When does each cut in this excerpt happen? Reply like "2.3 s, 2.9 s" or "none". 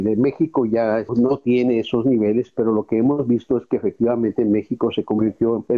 1.1 s